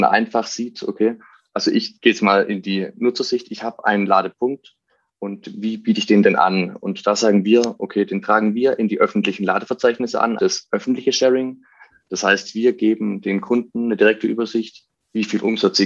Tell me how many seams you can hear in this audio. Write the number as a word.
two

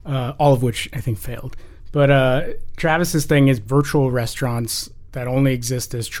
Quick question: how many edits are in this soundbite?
zero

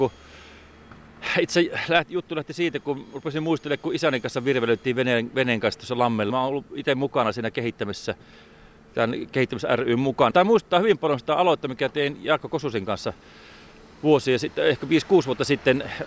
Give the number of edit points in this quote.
two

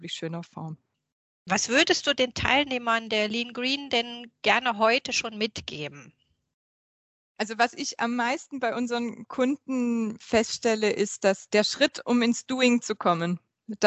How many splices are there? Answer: zero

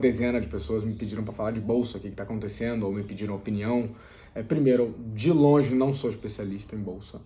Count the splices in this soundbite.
zero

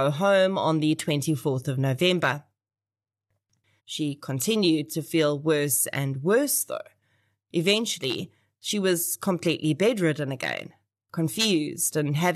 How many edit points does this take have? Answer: one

